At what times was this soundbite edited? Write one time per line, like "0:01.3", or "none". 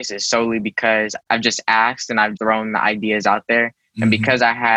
0:01.2
0:02.4